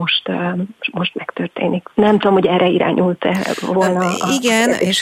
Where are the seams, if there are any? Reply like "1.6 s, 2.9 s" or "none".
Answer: none